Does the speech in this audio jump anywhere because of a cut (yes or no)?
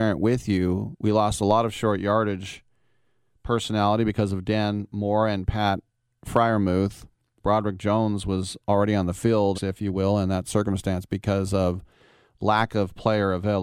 yes